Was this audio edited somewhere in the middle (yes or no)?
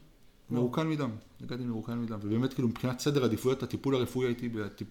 no